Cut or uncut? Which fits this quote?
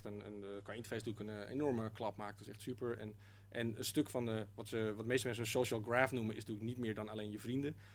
uncut